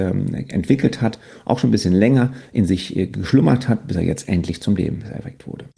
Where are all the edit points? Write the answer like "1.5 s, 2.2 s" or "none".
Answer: none

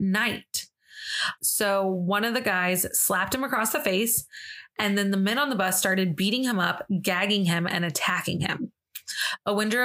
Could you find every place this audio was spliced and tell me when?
1.4 s

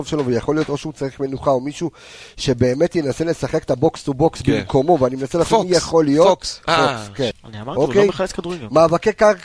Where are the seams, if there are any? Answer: 7.3 s

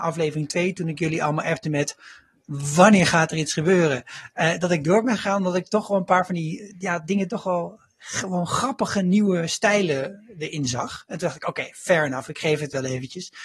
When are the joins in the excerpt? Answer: none

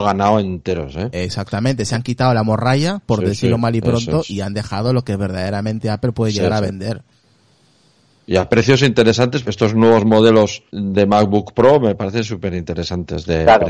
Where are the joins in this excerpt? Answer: 9.4 s, 10.7 s

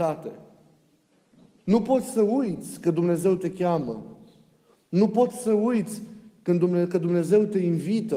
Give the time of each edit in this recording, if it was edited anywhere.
1.6 s

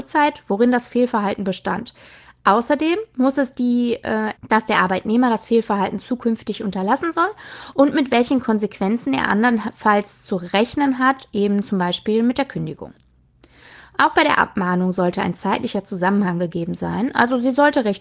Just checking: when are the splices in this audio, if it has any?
4.4 s

